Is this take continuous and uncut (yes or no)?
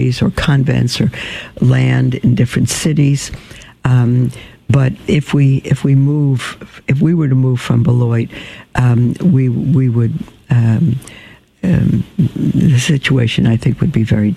yes